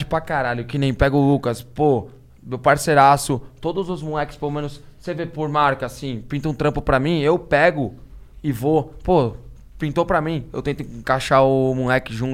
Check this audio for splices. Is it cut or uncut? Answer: uncut